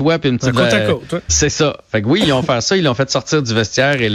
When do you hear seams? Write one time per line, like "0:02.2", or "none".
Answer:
0:01.3